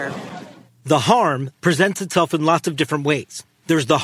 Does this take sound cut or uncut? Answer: cut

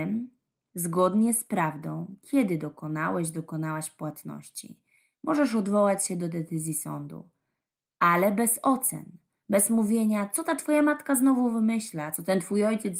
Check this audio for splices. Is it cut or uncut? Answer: uncut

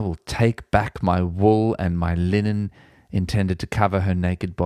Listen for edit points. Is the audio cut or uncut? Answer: uncut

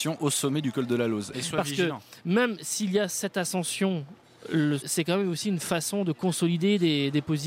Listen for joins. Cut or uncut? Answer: cut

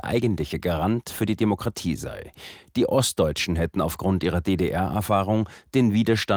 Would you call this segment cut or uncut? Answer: uncut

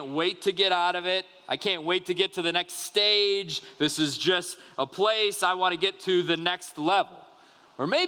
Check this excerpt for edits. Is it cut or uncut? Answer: uncut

